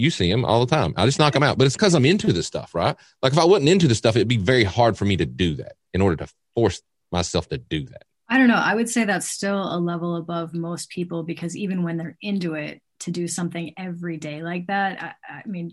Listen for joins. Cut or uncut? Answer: uncut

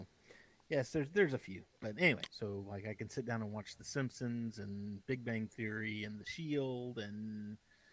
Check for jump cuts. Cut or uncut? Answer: cut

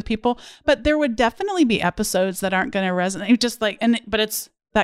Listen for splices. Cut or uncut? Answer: uncut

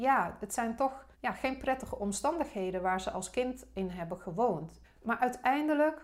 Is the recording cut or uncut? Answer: cut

